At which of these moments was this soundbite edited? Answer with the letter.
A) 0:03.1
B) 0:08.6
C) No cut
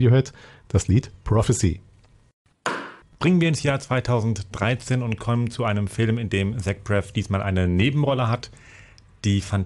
C